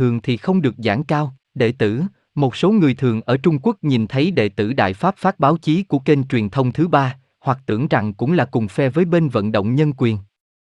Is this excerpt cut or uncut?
cut